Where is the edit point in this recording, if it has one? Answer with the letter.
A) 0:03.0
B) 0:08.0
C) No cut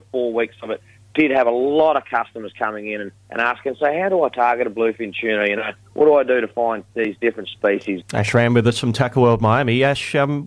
B